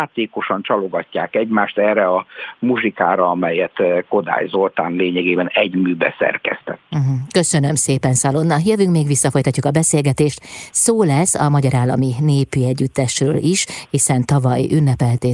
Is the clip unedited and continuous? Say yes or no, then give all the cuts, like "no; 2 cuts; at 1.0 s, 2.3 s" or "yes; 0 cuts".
yes; 0 cuts